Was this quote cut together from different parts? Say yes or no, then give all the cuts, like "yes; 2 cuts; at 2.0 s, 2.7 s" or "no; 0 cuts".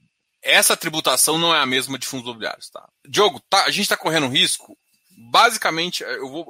yes; 1 cut; at 2.9 s